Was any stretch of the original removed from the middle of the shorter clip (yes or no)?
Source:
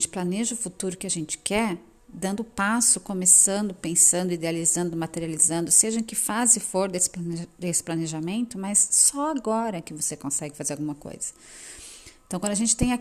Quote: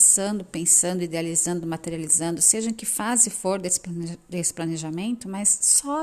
no